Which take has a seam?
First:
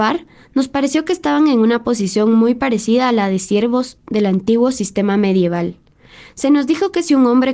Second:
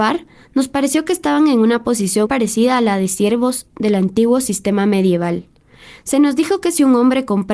second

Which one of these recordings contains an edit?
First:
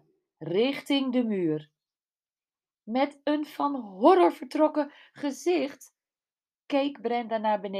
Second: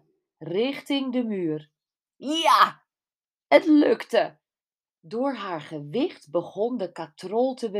second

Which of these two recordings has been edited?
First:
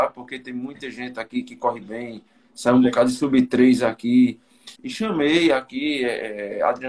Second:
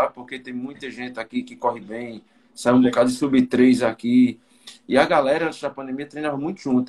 first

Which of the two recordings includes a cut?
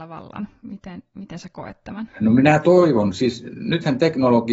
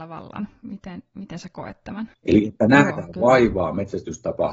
second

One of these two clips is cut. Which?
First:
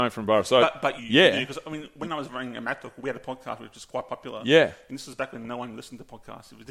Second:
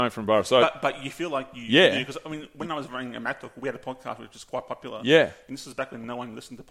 first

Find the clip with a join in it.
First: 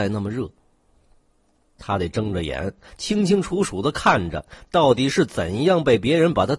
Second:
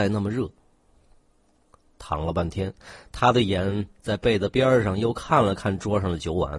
first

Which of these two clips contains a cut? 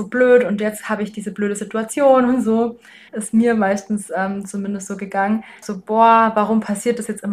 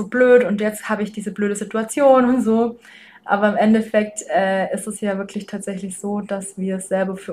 first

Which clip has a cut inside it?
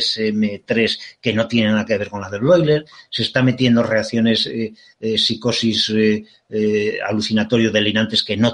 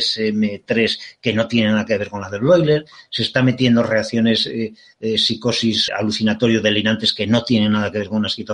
second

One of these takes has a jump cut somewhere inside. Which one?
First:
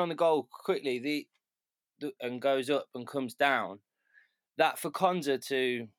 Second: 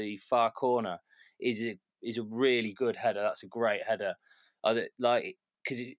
first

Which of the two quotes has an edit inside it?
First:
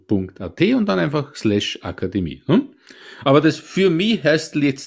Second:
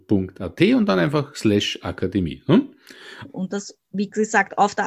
second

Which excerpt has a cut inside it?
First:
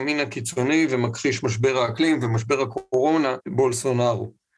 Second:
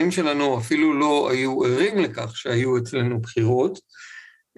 first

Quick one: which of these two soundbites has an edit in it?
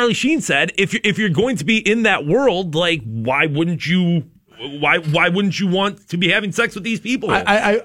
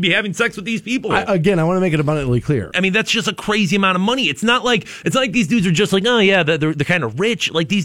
second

